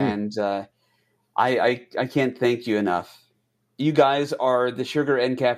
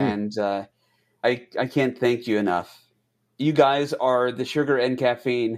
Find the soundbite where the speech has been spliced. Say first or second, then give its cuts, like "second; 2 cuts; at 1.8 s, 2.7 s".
second; 1 cut; at 1.2 s